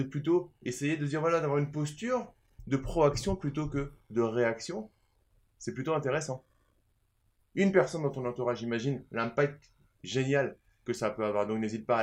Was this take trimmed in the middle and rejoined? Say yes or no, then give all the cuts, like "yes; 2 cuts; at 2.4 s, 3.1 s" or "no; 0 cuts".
no; 0 cuts